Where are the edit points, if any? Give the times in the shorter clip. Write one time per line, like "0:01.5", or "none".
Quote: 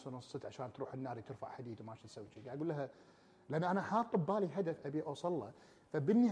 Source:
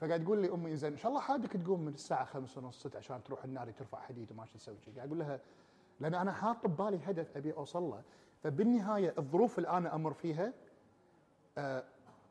none